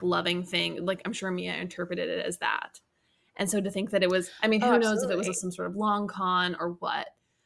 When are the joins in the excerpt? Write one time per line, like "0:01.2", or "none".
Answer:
none

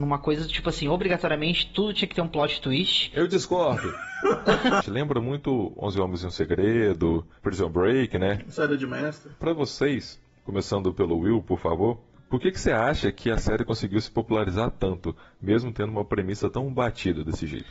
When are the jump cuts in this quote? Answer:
0:04.8

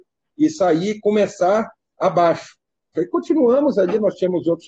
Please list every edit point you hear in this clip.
0:02.9

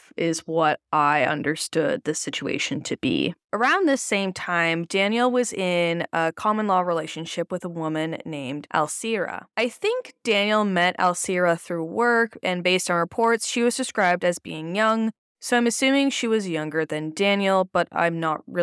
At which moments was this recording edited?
none

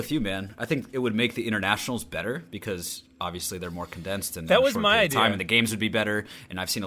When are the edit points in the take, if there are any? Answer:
none

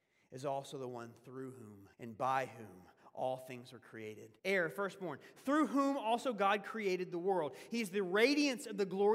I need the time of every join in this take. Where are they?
0:01.9
0:04.4

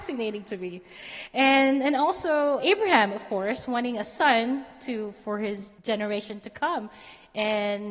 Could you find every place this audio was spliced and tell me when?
0:02.6
0:05.8

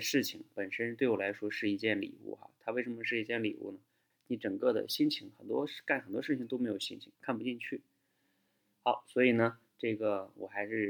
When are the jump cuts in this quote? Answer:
0:04.1
0:07.1

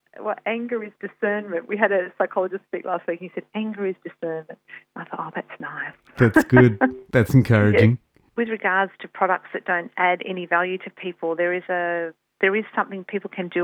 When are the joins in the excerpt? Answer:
0:08.3

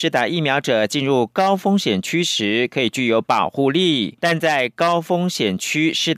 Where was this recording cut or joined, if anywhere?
0:04.2

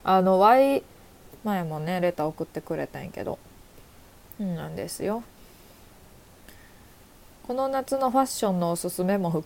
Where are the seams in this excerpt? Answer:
0:01.3

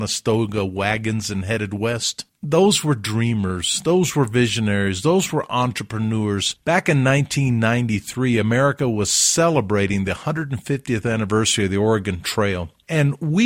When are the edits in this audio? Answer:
0:06.6

